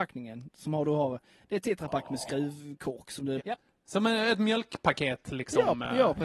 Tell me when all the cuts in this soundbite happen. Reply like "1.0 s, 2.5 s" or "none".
3.4 s

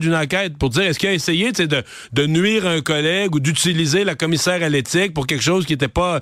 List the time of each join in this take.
none

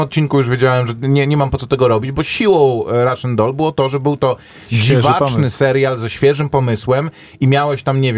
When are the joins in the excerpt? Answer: none

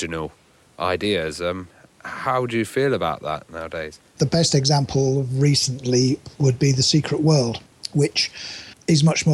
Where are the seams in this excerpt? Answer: 4.1 s, 6.3 s

